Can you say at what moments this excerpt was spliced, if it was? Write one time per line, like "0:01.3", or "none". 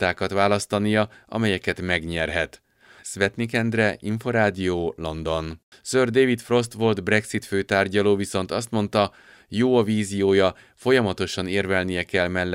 0:03.0
0:05.7